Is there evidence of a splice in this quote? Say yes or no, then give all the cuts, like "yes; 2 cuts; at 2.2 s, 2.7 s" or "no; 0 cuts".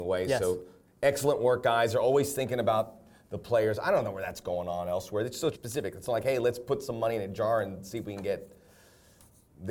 yes; 1 cut; at 5.5 s